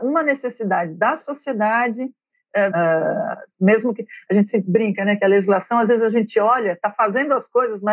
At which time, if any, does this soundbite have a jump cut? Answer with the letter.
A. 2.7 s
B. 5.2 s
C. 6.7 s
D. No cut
A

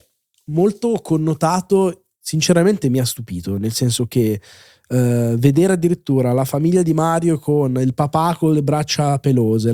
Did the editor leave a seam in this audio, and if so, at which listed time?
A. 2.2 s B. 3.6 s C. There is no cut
A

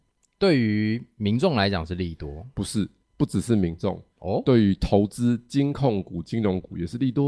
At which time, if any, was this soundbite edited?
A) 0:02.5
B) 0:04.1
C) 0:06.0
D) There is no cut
B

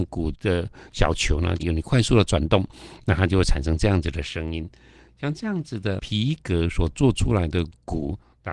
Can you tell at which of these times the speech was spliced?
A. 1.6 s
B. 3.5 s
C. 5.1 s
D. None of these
A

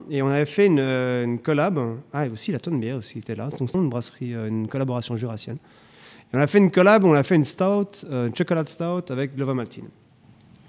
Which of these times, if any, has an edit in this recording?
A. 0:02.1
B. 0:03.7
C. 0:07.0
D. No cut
B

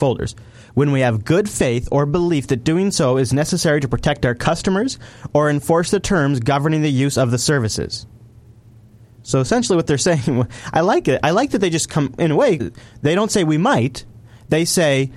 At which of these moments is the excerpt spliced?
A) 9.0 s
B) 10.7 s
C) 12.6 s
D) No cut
C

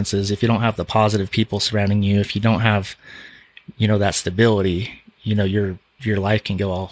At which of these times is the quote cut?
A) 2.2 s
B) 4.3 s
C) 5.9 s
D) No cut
C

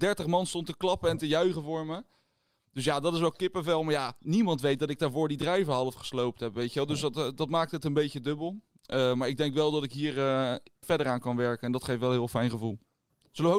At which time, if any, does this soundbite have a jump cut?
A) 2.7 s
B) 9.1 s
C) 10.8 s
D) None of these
C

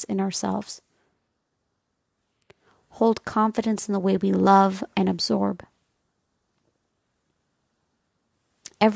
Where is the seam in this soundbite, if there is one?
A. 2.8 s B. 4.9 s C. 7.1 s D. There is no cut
B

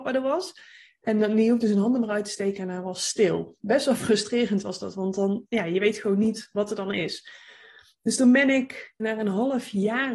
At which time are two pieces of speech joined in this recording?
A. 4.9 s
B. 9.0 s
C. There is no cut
B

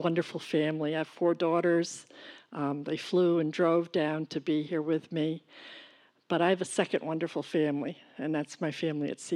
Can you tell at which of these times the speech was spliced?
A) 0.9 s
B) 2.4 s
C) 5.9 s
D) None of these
D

